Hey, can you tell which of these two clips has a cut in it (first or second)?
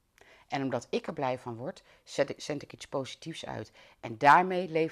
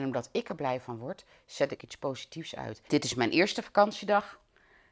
second